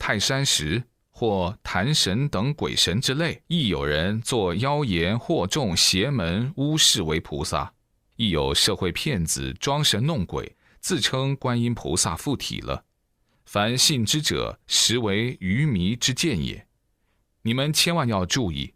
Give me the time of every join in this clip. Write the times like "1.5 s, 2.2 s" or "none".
3.5 s